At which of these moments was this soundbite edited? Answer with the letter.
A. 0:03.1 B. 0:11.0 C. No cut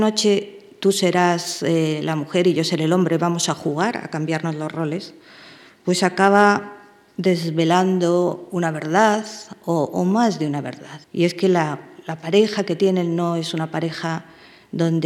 B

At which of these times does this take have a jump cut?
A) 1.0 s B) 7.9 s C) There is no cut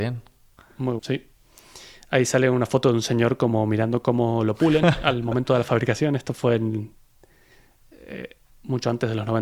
A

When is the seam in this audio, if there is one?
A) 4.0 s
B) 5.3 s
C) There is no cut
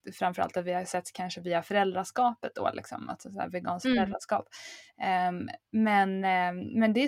C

